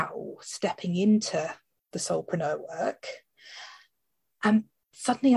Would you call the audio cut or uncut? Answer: uncut